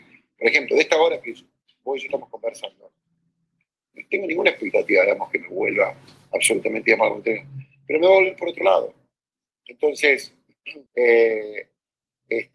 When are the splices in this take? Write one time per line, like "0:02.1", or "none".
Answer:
0:10.9

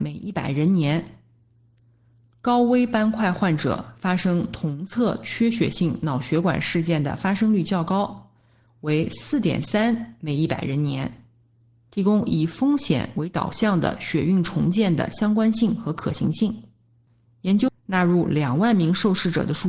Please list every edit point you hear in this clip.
0:11.9
0:17.7

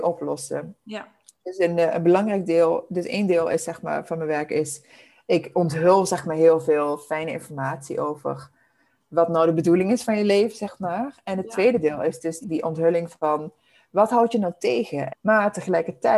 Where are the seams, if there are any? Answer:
0:12.4
0:15.1

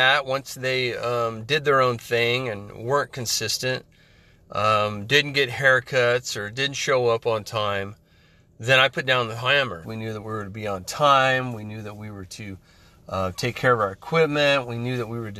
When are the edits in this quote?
0:09.8

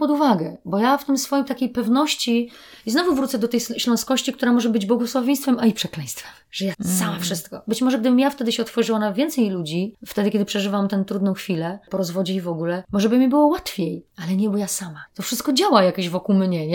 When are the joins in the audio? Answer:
0:06.7
0:15.1

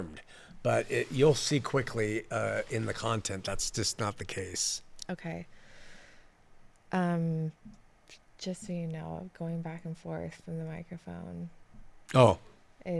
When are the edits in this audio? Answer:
none

